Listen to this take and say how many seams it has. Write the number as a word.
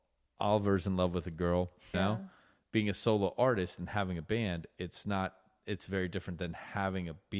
one